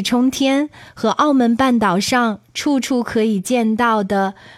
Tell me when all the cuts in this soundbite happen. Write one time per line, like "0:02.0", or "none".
none